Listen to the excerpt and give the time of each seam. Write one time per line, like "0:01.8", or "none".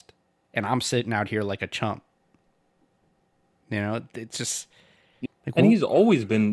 0:05.3